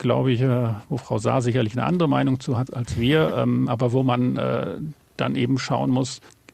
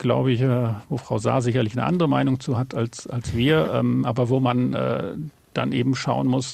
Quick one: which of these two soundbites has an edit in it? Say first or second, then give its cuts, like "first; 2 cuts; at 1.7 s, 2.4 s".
first; 1 cut; at 2.7 s